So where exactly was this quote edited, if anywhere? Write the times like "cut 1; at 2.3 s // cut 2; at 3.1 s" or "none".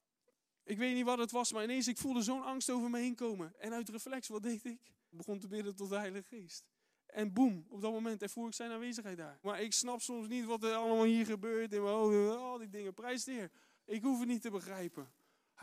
cut 1; at 5.1 s // cut 2; at 9.4 s // cut 3; at 13.8 s